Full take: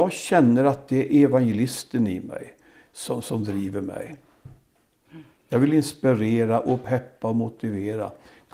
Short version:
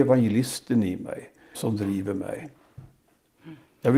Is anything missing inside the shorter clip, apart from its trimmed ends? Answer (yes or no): yes